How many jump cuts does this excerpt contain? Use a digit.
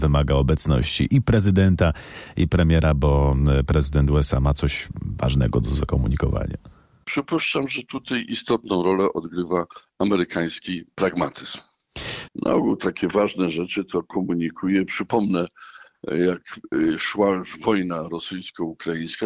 2